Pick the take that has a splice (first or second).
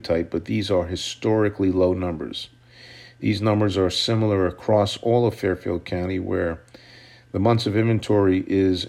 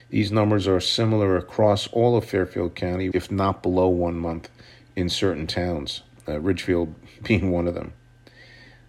second